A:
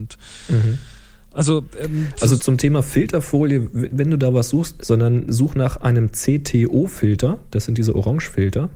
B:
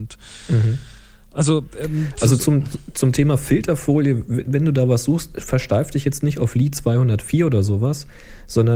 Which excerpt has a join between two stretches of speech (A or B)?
A